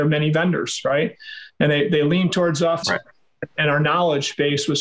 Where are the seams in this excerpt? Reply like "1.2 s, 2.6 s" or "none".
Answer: 2.8 s